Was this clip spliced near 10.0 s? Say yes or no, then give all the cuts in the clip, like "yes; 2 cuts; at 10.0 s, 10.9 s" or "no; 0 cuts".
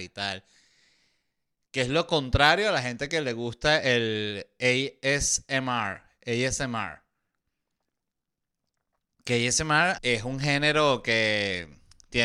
yes; 1 cut; at 10.0 s